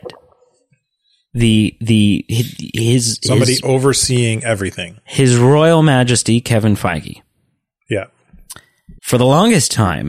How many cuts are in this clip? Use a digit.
1